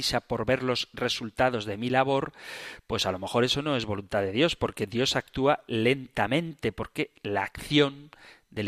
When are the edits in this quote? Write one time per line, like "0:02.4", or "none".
none

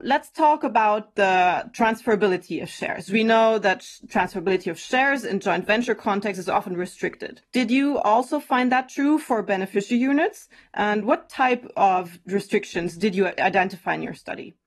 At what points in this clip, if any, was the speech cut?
none

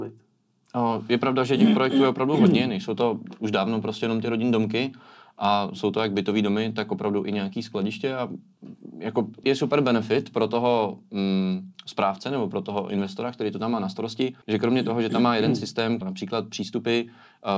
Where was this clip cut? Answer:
0:09.4
0:14.4
0:16.0

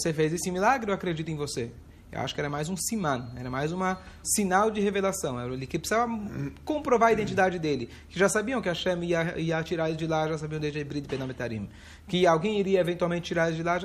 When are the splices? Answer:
0:04.2

